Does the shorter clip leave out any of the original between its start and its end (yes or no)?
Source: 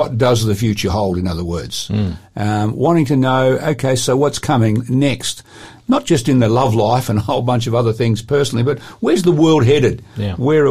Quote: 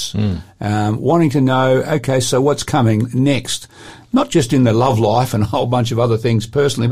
no